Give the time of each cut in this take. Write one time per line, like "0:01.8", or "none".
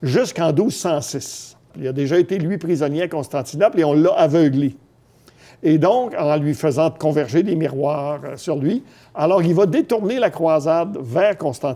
0:01.7